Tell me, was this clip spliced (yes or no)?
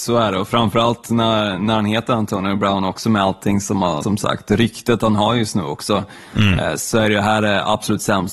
yes